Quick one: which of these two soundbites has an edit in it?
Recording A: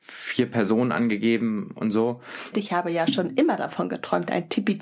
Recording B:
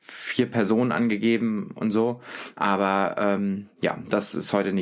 A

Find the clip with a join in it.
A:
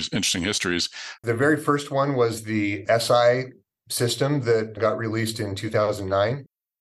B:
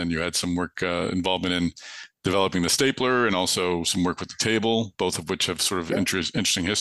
A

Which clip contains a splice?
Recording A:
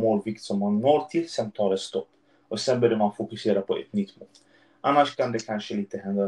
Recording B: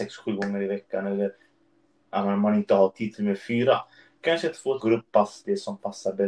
B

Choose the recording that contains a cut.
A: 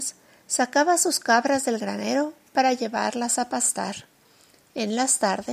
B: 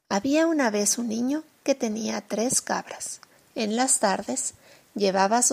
B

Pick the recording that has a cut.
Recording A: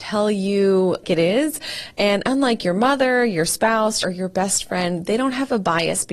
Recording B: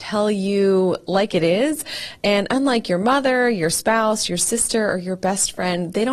A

